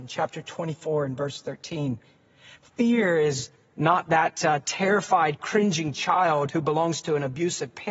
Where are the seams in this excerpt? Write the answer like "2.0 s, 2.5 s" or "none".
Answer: none